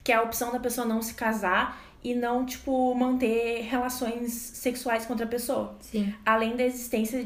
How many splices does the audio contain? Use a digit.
0